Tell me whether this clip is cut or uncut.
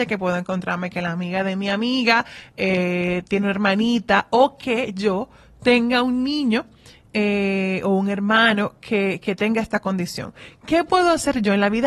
uncut